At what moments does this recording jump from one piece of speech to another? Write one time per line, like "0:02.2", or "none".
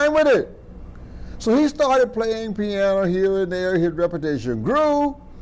none